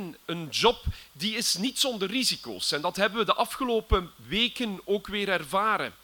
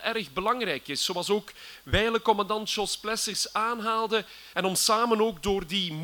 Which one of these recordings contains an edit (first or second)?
second